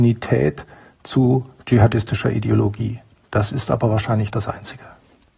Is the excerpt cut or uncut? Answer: uncut